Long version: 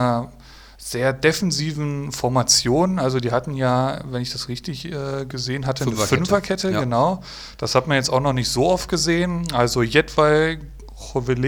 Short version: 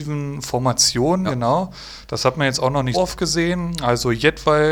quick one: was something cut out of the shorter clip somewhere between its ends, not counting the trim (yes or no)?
yes